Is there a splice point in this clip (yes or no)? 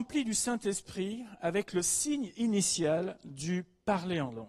no